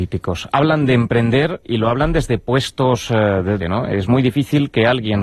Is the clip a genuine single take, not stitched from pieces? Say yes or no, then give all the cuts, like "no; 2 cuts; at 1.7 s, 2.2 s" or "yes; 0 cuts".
no; 2 cuts; at 1.6 s, 3.6 s